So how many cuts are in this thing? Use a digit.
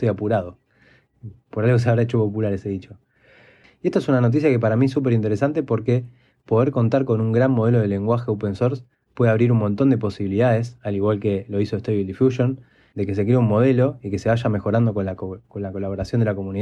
1